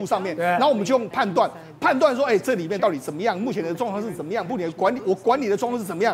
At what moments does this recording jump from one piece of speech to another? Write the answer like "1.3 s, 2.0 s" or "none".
1.1 s